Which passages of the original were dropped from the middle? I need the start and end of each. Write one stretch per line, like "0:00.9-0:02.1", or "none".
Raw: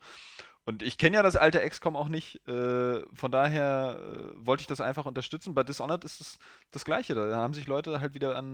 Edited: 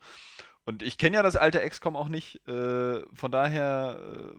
none

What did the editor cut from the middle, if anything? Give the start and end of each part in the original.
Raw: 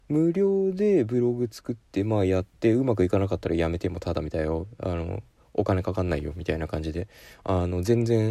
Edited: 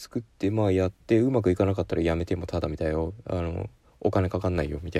none

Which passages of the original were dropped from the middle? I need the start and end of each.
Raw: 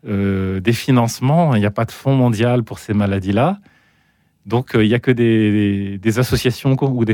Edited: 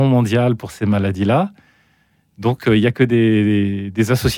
none

